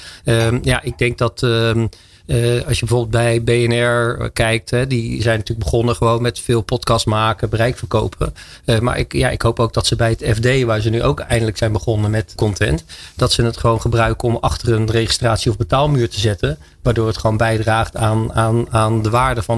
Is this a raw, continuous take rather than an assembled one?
no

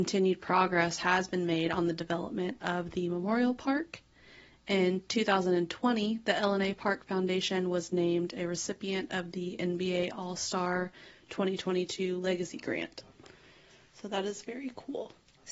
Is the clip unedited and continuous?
yes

